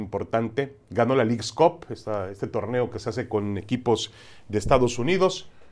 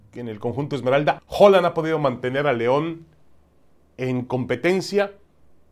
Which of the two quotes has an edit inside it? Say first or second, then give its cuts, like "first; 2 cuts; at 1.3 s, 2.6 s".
second; 1 cut; at 1.2 s